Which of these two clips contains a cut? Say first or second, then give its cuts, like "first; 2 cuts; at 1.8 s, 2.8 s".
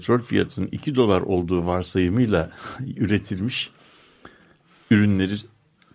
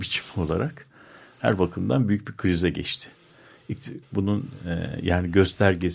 second; 1 cut; at 4.0 s